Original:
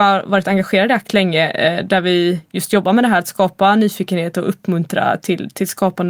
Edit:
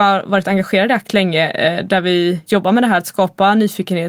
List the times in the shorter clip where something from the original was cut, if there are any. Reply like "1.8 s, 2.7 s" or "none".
2.5 s